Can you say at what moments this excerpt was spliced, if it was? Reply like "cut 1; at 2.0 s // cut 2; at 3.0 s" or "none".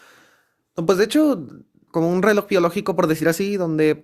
cut 1; at 1.9 s

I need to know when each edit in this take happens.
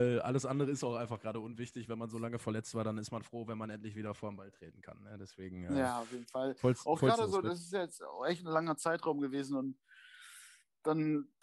none

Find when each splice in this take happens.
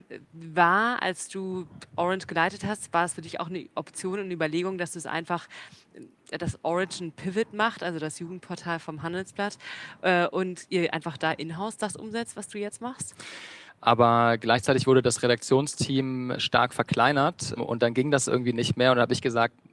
cut 1; at 13.7 s // cut 2; at 17.6 s

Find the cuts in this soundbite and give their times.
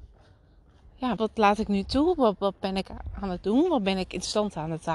cut 1; at 1.2 s

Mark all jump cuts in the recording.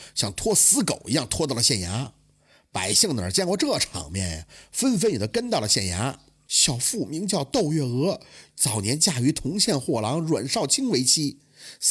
cut 1; at 6.5 s // cut 2; at 8.5 s

